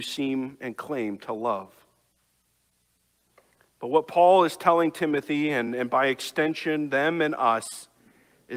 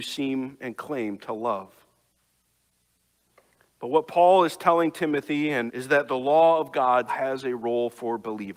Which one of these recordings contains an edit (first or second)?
second